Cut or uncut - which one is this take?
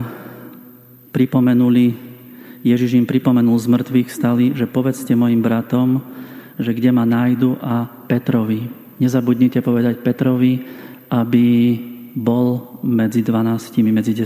uncut